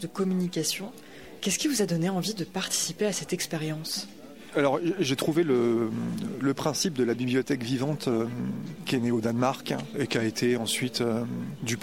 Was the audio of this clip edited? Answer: yes; 1 cut; at 1.4 s

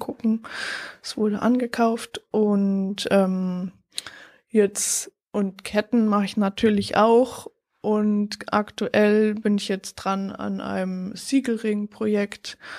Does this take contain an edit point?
no; 0 cuts

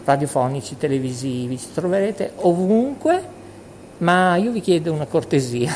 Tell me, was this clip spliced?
no; 0 cuts

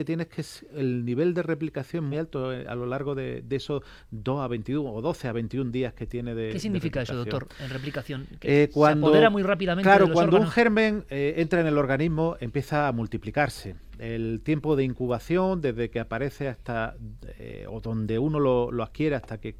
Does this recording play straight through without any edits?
no; 1 cut; at 2.1 s

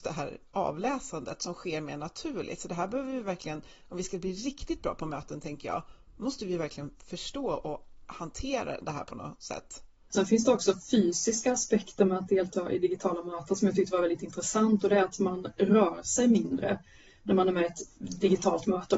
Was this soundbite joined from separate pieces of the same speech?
yes; 1 cut; at 10.1 s

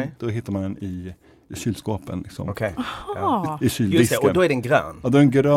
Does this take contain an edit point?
no; 0 cuts

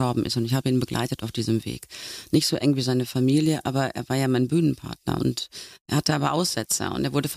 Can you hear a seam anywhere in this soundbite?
no; 0 cuts

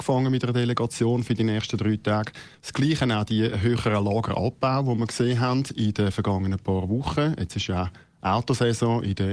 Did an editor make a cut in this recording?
yes; 1 cut; at 2.5 s

